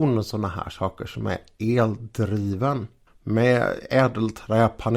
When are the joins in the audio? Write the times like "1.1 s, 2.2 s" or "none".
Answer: 3.1 s